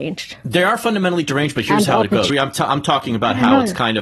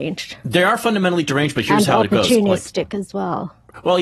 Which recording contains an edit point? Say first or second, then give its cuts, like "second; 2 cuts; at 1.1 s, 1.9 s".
first; 1 cut; at 2.3 s